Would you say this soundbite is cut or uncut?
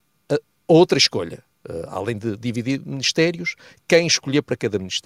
uncut